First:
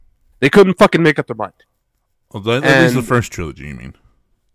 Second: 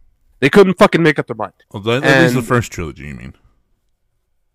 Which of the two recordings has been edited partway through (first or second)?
second